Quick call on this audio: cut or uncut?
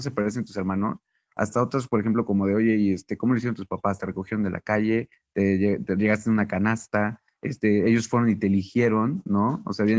uncut